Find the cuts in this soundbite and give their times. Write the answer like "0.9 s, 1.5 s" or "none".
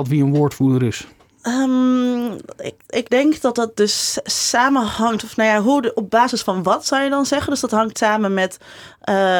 none